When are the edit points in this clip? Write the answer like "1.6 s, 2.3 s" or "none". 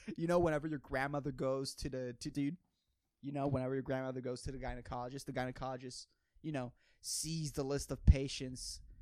2.3 s